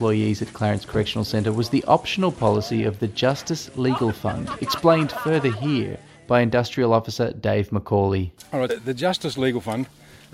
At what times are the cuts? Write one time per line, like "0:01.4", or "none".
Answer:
0:08.7